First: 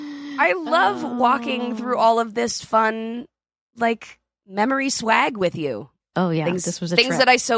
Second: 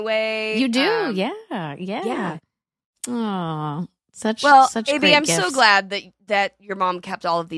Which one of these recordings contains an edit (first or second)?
first